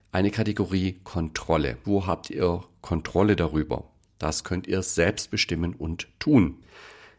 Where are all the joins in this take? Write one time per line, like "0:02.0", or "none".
0:01.8